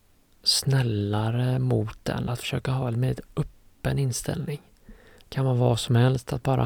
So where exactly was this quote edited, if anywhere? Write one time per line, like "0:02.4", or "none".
none